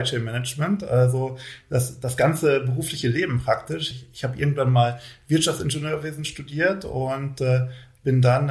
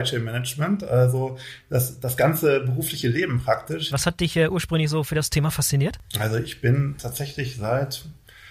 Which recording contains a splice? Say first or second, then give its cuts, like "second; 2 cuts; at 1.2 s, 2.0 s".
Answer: second; 1 cut; at 3.9 s